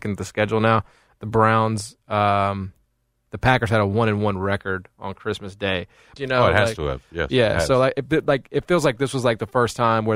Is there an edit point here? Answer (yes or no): yes